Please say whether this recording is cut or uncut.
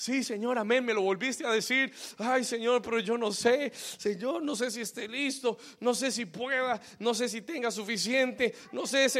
uncut